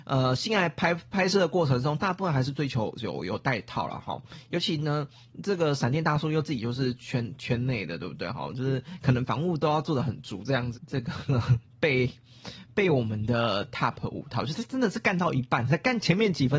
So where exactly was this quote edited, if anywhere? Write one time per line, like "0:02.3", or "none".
0:10.7